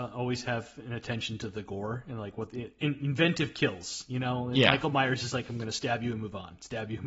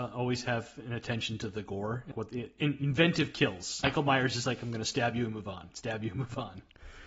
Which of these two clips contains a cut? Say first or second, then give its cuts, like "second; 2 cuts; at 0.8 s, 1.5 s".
second; 2 cuts; at 2.1 s, 3.8 s